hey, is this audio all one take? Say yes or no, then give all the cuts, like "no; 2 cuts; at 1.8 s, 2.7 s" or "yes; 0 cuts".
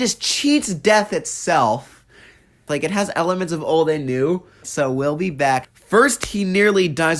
no; 3 cuts; at 2.7 s, 4.6 s, 5.6 s